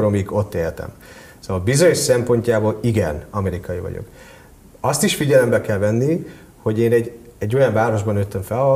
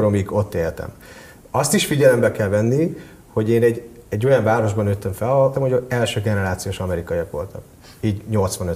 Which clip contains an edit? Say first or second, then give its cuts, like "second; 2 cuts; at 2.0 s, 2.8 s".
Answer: second; 2 cuts; at 1.4 s, 5.5 s